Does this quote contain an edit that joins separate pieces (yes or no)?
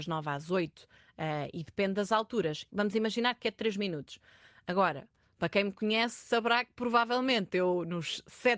yes